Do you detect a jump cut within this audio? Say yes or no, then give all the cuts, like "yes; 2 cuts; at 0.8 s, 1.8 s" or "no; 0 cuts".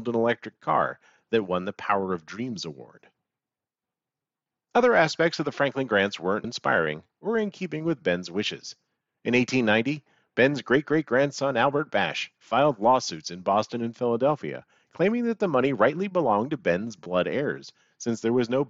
yes; 1 cut; at 6.4 s